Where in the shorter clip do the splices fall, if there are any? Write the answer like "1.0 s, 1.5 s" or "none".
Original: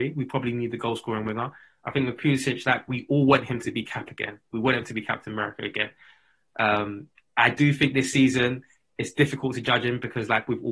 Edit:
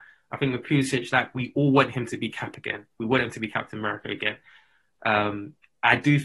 none